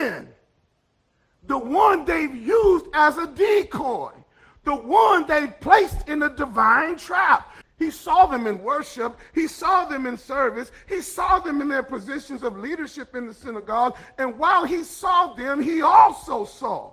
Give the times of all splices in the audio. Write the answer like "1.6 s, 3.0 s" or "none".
7.6 s